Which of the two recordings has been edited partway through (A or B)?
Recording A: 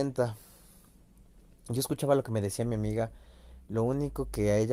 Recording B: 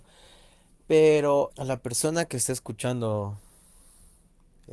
B